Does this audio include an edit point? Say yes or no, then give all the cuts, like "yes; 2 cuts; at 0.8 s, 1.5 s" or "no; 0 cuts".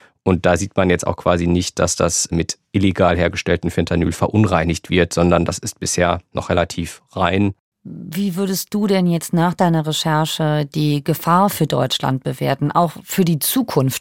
no; 0 cuts